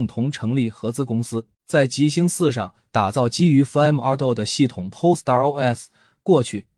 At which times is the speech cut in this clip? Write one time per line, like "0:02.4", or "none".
0:01.5